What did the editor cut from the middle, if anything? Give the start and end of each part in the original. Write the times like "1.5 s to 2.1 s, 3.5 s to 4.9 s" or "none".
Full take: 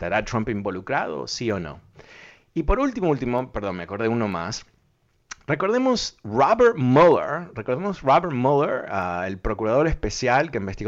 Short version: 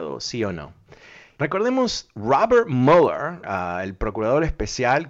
2.4 s to 5.5 s, 7.5 s to 8.9 s